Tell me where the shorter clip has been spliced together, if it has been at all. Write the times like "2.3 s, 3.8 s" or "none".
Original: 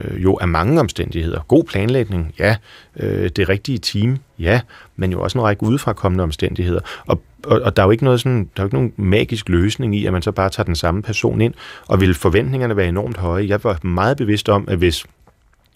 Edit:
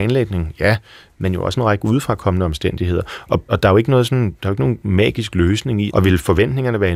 1.1 s, 3.5 s, 5.9 s